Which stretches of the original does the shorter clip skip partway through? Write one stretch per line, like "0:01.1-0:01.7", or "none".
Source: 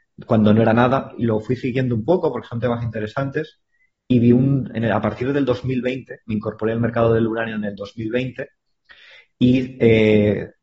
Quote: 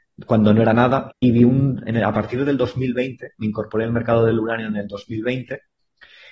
0:01.1-0:04.0